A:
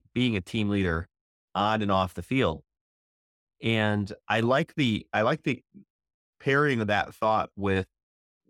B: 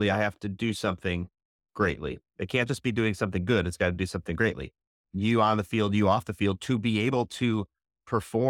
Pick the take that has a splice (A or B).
B